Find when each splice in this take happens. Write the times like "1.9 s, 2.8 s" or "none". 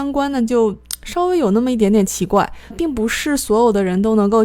2.7 s